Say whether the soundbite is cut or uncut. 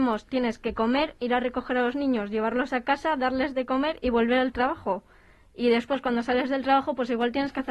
uncut